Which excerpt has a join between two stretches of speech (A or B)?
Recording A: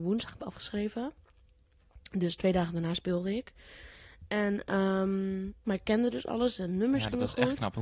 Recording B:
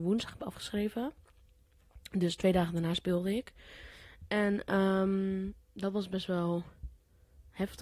A